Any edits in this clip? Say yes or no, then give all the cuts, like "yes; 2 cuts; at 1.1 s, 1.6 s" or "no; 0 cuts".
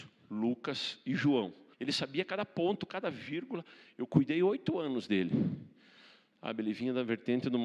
yes; 2 cuts; at 1.7 s, 6.3 s